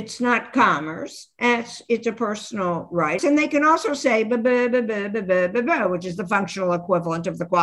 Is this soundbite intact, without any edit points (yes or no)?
no